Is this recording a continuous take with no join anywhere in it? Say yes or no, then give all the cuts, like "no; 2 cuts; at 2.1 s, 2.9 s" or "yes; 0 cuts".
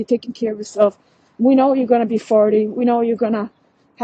yes; 0 cuts